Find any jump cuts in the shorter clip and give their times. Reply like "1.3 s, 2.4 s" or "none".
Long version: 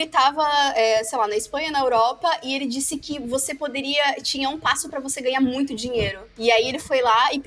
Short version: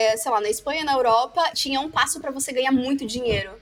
1.5 s